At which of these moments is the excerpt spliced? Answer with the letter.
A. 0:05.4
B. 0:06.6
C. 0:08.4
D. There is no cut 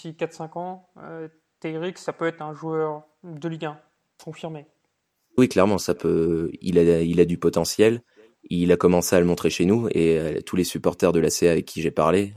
A